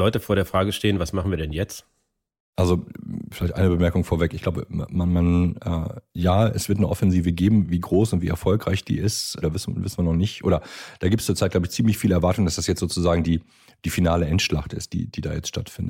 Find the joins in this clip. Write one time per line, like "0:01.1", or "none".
0:09.4